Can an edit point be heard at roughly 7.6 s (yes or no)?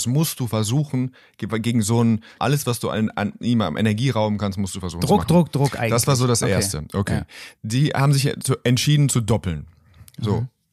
yes